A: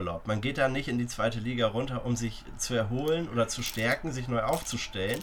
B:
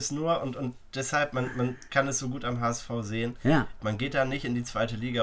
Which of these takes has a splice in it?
B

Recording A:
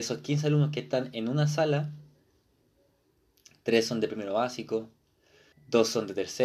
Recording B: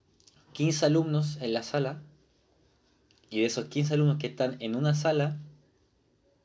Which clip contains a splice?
A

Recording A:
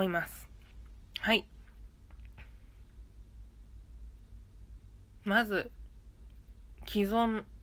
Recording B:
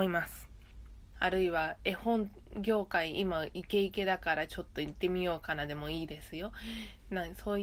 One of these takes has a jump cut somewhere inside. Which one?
B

